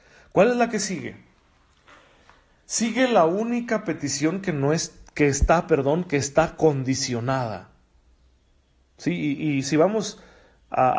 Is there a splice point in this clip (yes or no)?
no